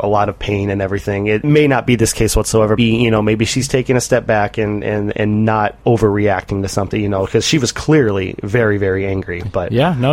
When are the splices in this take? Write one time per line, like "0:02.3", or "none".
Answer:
0:02.8